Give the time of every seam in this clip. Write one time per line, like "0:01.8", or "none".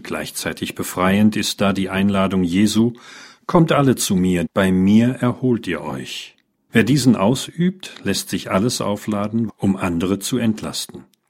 0:04.5
0:06.7
0:09.5